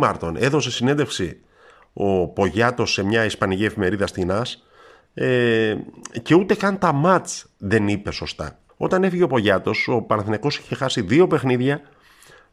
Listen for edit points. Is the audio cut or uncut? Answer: cut